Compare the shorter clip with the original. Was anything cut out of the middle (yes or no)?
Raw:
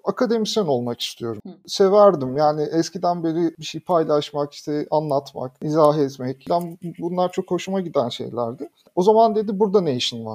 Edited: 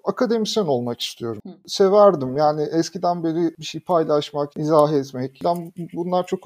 yes